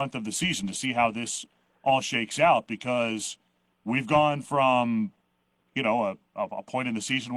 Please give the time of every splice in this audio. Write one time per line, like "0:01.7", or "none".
none